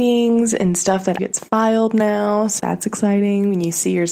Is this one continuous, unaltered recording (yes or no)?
no